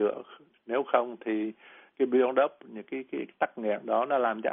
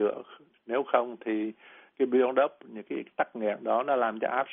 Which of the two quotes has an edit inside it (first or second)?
second